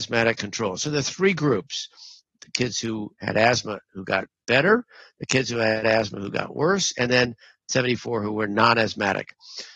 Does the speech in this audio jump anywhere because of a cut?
no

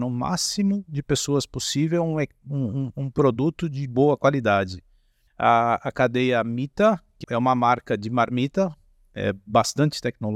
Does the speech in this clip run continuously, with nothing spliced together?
no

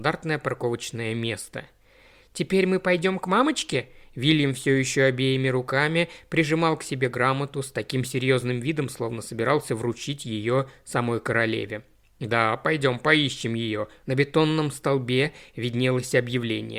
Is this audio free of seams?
no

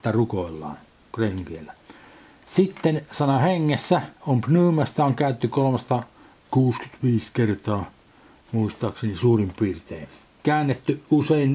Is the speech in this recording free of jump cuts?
no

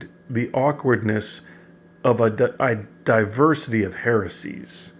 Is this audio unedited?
yes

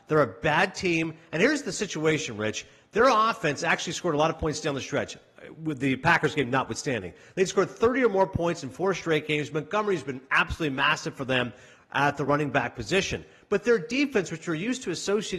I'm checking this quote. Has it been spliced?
no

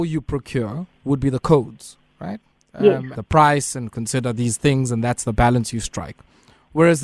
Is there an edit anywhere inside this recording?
yes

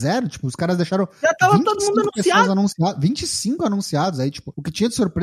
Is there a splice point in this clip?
no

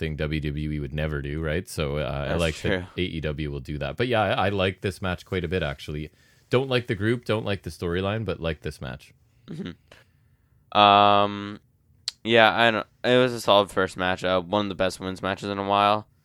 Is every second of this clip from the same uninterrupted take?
yes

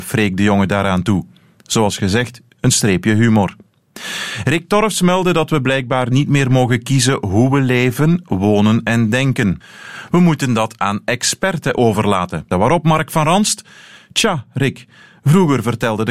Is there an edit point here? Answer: yes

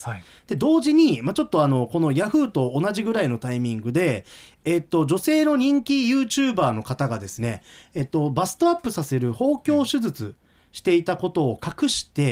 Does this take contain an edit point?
no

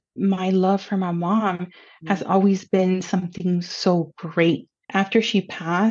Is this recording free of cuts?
no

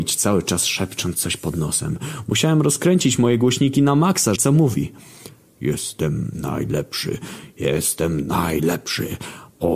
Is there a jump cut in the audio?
yes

